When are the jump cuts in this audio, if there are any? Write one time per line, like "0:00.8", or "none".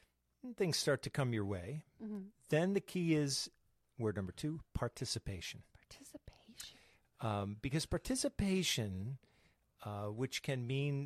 none